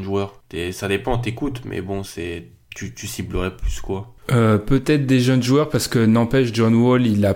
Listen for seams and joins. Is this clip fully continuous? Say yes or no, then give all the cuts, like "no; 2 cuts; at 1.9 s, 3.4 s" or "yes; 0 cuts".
no; 1 cut; at 4.2 s